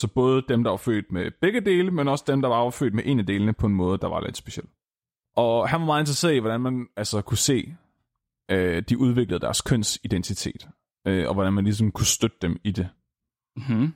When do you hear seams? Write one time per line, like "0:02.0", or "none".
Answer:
none